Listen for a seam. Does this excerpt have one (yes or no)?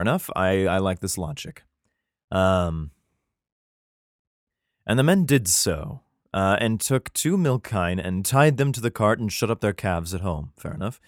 no